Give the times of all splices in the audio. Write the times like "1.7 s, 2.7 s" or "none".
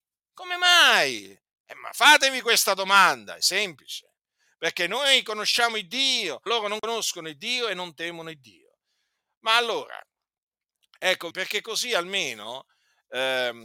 6.5 s, 11.3 s